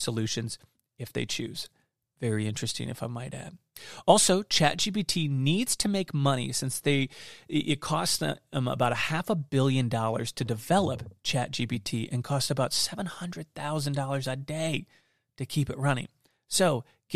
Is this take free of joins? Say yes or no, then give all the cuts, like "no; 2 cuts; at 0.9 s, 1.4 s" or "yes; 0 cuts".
yes; 0 cuts